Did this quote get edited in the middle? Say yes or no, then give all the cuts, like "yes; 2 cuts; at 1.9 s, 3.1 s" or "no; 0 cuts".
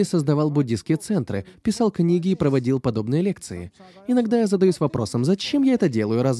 no; 0 cuts